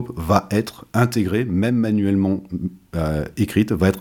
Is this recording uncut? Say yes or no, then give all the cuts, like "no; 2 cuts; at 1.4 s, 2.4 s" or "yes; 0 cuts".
yes; 0 cuts